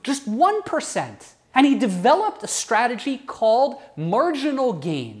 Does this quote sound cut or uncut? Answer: cut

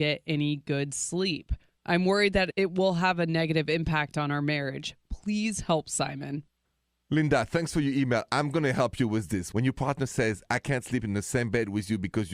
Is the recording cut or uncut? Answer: uncut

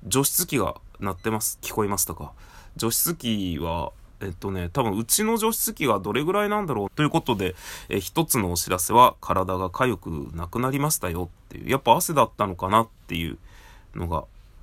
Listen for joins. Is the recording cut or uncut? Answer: cut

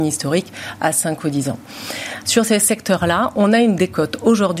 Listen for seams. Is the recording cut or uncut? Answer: cut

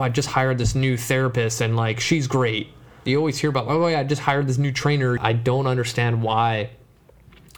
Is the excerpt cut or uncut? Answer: cut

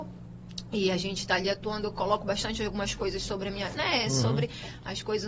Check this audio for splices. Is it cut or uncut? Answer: cut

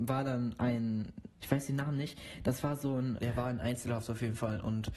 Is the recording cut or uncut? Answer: cut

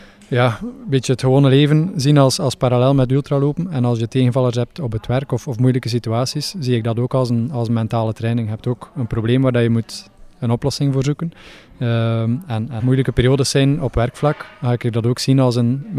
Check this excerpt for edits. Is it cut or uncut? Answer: cut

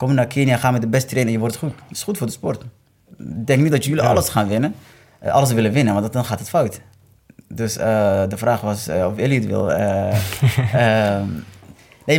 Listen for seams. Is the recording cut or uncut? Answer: uncut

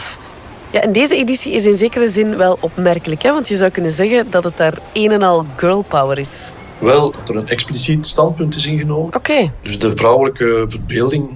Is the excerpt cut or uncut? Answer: cut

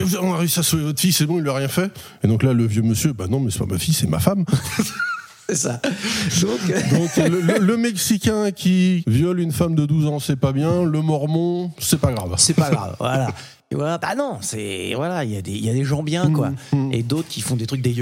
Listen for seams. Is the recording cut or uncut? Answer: uncut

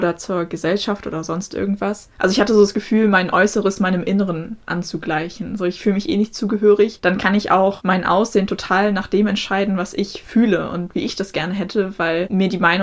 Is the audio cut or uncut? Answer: uncut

